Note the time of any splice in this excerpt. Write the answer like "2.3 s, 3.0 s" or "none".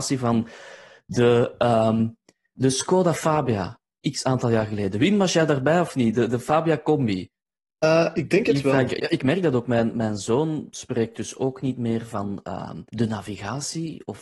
9.0 s, 12.9 s